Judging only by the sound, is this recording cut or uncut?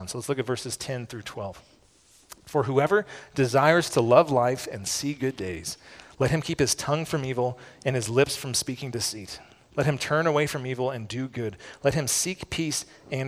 uncut